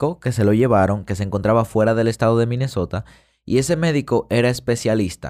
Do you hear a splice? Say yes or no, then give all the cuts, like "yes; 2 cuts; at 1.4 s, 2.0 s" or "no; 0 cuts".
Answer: no; 0 cuts